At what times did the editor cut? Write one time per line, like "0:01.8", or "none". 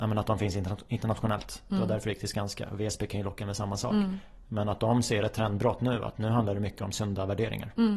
none